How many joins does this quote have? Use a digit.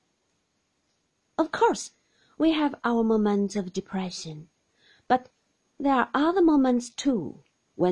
1